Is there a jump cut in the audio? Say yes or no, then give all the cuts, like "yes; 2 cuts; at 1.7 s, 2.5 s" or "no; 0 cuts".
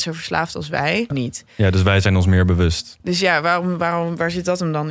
yes; 2 cuts; at 1.1 s, 3.0 s